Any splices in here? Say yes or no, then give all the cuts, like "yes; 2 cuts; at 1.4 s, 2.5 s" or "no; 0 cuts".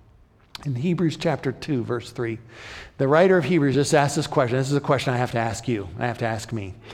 no; 0 cuts